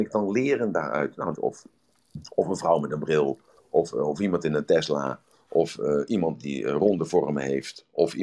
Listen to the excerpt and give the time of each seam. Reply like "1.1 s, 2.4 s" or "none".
1.3 s